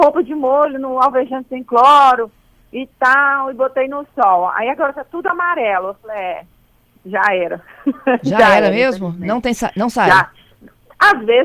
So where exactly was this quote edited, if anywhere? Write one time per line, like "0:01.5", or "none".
none